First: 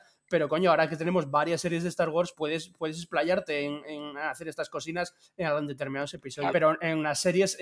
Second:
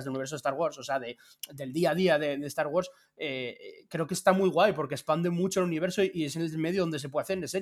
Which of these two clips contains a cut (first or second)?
first